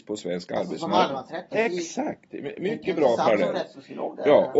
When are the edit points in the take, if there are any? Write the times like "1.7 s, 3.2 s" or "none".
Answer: 1.5 s